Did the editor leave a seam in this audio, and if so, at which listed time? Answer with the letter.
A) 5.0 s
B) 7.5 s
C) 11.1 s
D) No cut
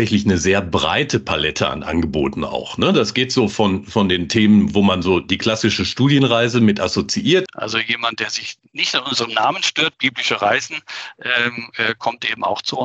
B